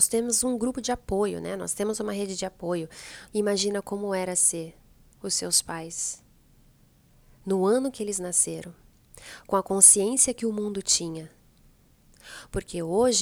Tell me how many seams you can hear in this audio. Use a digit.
1